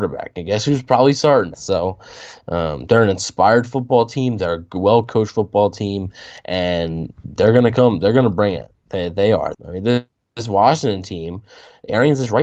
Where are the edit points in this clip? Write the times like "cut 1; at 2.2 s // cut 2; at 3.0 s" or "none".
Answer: cut 1; at 1.5 s // cut 2; at 9.5 s